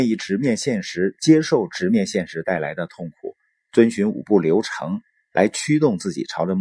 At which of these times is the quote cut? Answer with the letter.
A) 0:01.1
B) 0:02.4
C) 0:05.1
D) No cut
D